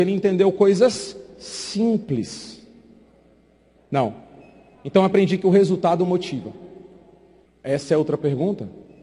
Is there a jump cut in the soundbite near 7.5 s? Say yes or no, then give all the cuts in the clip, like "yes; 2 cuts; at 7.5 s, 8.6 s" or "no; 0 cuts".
yes; 2 cuts; at 3.8 s, 7.5 s